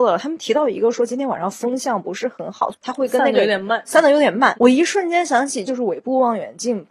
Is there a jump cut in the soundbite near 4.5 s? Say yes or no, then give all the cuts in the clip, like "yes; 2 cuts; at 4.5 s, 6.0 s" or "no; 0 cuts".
yes; 3 cuts; at 2.7 s, 4.5 s, 5.7 s